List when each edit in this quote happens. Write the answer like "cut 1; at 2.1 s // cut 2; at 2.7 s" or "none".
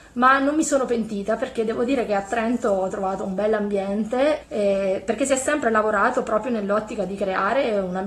cut 1; at 4.4 s